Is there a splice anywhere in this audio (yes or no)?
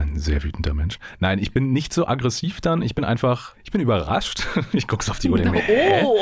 no